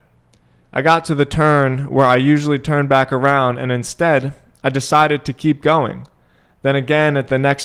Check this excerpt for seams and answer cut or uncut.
uncut